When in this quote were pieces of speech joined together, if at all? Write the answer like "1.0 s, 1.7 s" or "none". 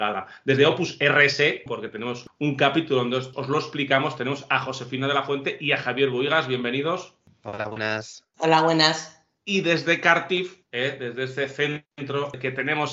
1.7 s, 8.3 s